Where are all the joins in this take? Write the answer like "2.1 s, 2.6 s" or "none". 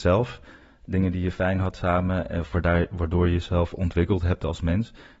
none

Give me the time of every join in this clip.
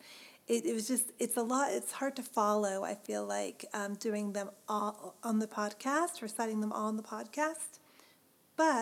none

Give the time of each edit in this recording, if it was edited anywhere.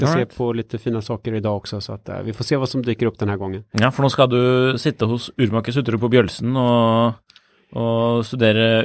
none

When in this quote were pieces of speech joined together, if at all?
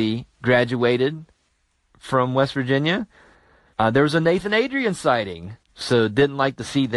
3.7 s, 5.7 s

